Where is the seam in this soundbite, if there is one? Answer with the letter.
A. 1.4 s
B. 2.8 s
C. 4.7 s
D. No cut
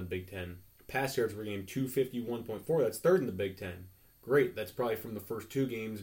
D